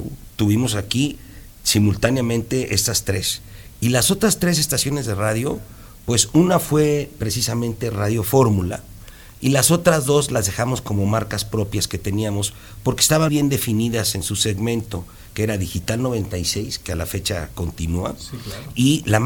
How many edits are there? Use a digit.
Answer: 1